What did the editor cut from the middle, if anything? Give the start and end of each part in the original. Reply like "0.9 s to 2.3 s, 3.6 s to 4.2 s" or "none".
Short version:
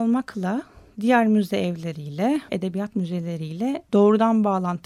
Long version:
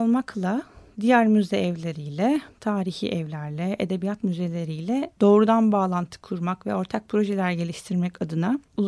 2.5 s to 3.8 s